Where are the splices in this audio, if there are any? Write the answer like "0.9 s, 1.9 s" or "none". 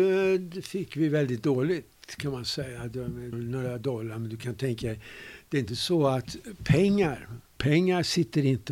3.3 s, 7.6 s